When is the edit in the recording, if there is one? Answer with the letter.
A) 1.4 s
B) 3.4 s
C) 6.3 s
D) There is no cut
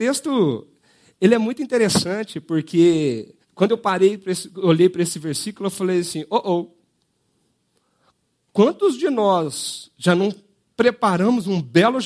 B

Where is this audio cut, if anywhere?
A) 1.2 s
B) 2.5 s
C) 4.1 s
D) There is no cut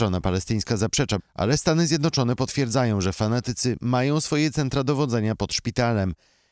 A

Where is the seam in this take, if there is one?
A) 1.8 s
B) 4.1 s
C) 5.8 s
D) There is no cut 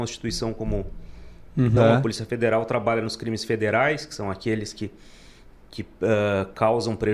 A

